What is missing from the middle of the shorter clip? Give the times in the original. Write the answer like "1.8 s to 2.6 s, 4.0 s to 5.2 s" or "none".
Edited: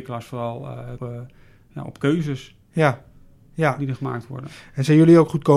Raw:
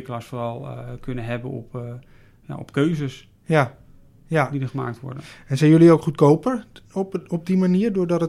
1.0 s to 1.7 s